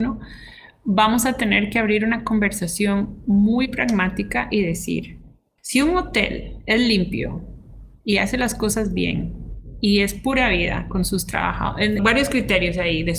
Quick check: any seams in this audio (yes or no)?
yes